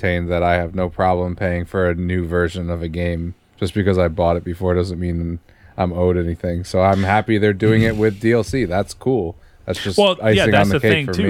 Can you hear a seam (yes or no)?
no